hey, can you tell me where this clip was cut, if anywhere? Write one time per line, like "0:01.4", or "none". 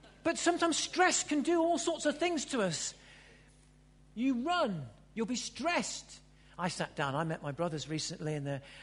0:04.0
0:06.4